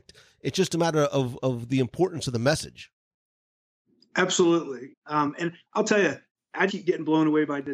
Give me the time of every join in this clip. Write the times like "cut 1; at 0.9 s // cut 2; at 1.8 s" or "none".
cut 1; at 4.9 s // cut 2; at 6.7 s